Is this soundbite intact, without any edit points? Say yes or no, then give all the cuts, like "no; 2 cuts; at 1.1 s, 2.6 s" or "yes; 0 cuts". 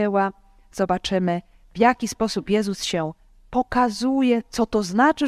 yes; 0 cuts